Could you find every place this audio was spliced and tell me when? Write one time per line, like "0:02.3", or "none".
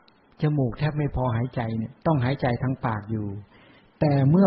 0:02.0

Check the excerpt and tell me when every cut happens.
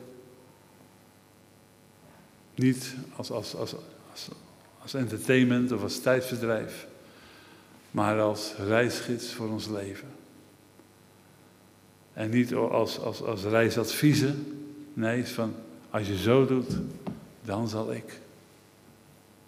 none

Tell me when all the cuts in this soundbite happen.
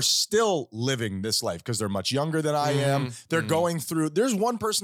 none

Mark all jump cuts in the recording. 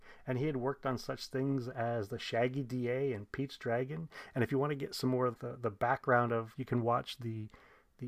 0:05.3
0:06.5

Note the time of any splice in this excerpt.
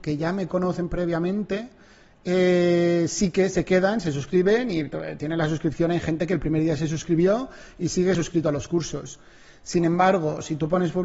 none

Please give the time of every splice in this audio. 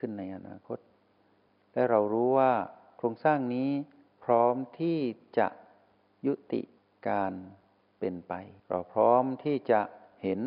0:08.6

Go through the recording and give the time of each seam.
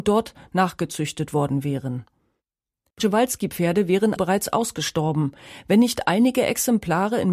0:02.9
0:04.2

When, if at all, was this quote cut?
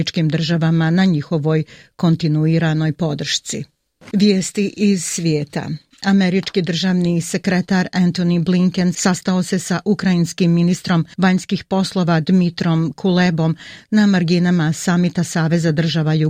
0:04.1

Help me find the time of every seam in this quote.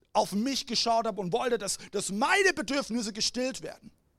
none

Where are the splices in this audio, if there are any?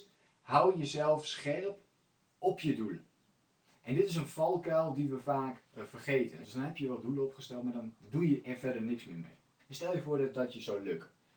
0:06.4
0:09.6

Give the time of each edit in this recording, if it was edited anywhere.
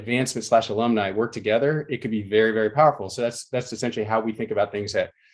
none

